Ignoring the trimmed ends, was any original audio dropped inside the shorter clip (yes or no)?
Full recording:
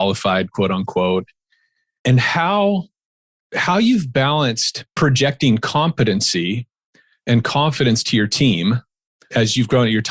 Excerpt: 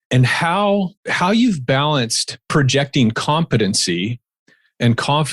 yes